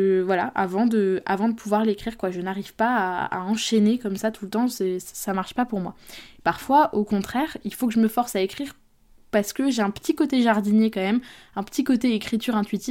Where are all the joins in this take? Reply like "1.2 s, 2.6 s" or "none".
none

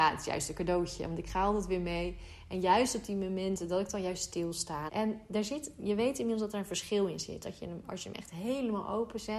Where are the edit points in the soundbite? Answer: 4.9 s

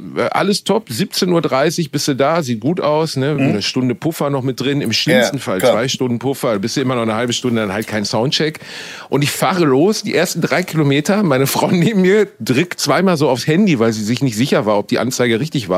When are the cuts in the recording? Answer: none

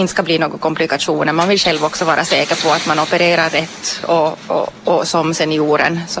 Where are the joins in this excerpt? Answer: none

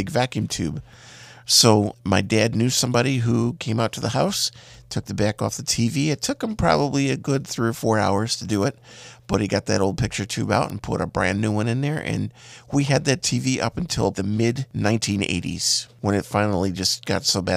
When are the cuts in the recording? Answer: 1.9 s, 14.1 s

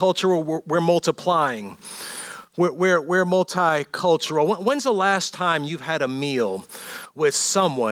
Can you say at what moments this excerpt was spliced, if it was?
none

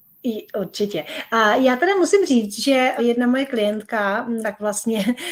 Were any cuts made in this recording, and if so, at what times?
3.0 s, 4.4 s

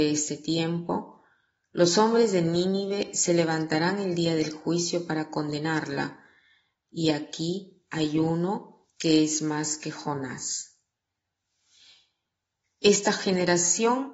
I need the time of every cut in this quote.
6.9 s

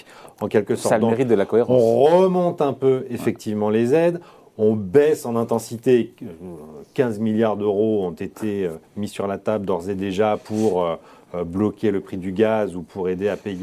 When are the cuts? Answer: none

